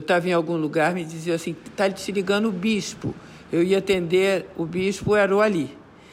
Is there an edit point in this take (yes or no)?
no